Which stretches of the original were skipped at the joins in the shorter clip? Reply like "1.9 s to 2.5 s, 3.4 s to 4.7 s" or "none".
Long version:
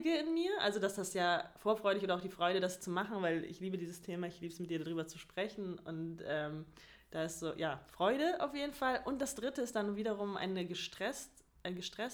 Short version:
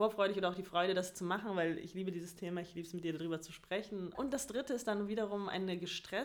5.8 s to 9.0 s